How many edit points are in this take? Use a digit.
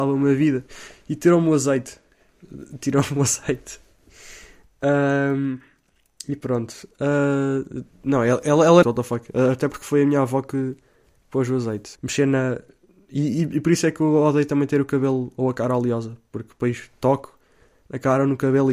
2